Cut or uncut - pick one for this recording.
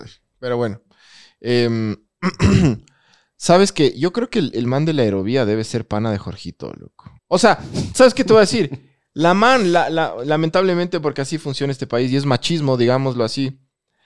cut